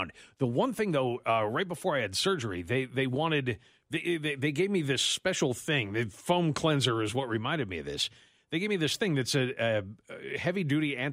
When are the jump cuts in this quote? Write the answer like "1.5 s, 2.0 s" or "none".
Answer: none